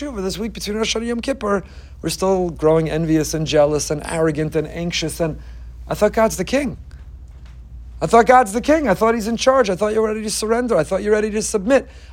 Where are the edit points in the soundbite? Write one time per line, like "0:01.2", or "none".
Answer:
none